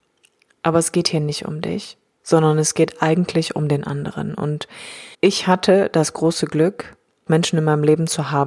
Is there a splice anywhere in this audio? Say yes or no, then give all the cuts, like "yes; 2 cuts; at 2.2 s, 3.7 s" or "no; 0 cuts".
yes; 2 cuts; at 5.1 s, 7.3 s